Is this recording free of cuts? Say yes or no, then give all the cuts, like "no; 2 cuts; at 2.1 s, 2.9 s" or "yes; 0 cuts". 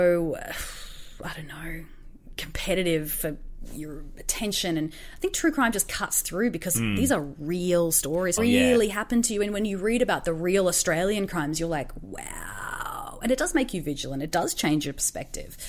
no; 1 cut; at 8.4 s